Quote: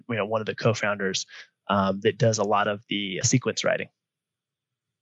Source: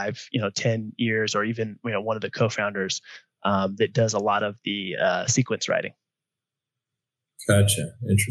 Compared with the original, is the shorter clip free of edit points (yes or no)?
no